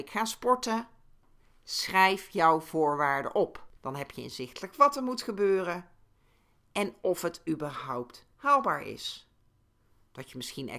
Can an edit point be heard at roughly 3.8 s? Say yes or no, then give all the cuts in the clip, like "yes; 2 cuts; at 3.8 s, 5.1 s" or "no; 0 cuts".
yes; 1 cut; at 3.8 s